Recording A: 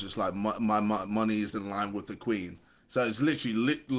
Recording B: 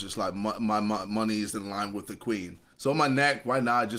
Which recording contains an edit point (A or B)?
B